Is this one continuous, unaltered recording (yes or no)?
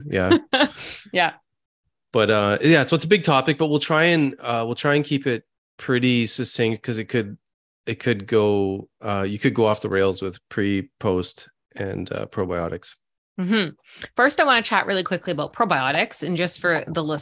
yes